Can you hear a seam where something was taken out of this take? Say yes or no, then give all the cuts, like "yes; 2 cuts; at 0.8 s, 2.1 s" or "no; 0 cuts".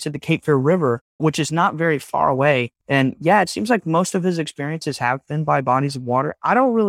yes; 1 cut; at 2.8 s